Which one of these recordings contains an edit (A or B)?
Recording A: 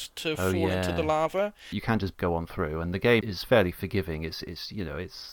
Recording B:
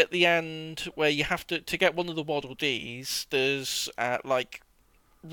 A